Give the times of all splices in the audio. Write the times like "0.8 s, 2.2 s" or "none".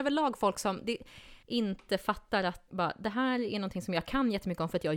1.4 s, 2.7 s